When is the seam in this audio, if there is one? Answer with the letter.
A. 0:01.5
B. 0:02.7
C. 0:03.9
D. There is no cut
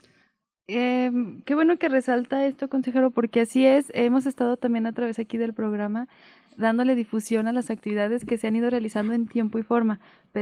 D